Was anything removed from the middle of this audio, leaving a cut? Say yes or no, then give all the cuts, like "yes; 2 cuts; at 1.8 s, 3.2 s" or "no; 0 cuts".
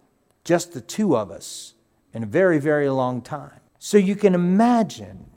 yes; 1 cut; at 3.7 s